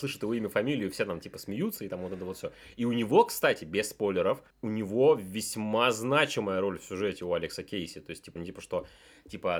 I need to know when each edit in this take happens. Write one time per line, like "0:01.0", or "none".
0:04.5
0:08.4